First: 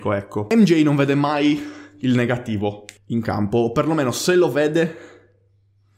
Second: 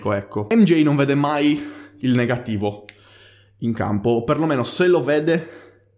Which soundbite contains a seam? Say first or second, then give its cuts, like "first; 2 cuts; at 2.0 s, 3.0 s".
first; 1 cut; at 3.0 s